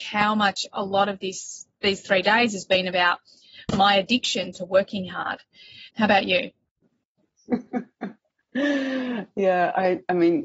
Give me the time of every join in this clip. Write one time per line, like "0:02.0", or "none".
0:05.9